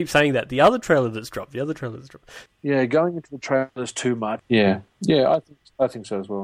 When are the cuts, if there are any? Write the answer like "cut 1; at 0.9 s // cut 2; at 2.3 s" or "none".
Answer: cut 1; at 2.5 s // cut 2; at 4.4 s